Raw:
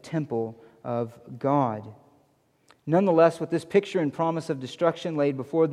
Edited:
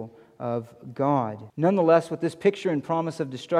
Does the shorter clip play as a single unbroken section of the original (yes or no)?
no